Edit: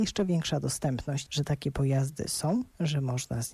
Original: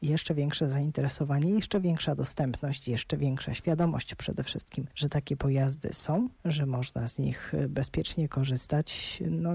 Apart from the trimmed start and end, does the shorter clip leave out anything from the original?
yes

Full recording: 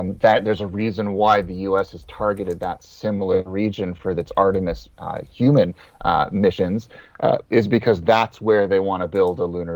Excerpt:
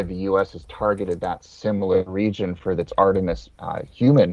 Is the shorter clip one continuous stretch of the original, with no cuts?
yes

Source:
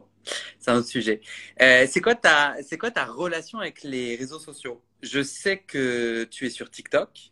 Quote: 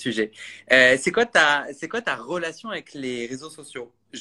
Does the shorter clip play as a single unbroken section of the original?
yes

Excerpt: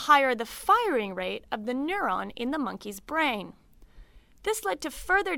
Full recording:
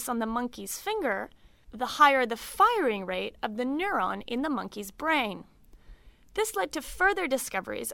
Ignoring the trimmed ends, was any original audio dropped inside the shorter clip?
no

